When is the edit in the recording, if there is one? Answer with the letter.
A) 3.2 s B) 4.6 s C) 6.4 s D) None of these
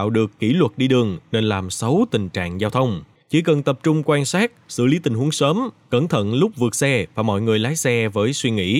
A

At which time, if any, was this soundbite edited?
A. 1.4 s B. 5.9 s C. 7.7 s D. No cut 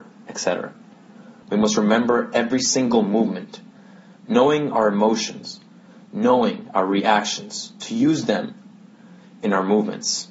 A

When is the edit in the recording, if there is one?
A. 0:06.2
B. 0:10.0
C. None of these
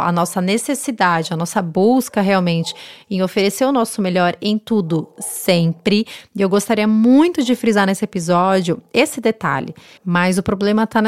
B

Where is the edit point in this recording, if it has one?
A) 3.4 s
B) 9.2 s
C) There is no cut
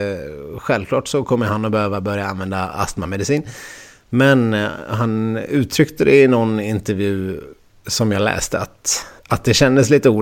B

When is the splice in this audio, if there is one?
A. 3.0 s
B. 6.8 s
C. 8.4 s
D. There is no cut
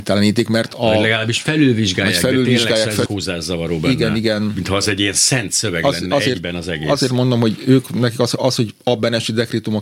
A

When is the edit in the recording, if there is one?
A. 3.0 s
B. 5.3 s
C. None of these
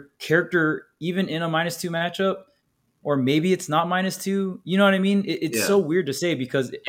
A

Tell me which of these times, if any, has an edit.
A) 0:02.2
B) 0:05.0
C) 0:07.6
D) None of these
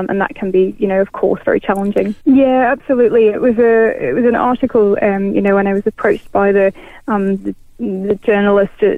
A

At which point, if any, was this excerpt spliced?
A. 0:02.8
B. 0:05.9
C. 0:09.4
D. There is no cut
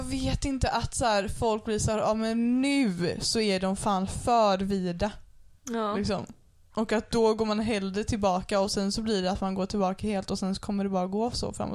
D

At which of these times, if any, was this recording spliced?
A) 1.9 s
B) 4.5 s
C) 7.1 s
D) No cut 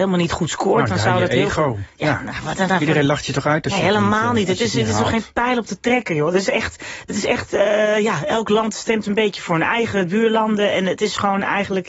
D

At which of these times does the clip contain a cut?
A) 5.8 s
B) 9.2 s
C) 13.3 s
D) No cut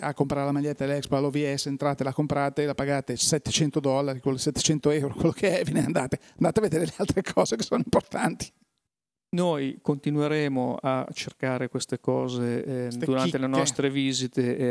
D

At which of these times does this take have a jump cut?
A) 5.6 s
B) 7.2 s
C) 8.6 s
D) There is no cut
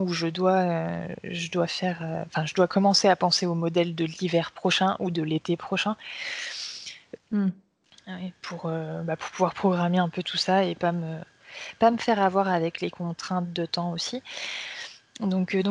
B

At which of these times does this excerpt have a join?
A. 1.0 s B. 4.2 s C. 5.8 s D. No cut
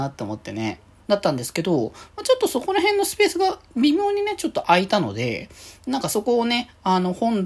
A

